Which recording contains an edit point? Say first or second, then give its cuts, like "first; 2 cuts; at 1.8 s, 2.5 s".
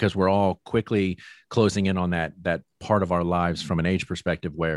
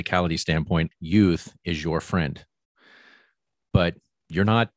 second; 1 cut; at 0.9 s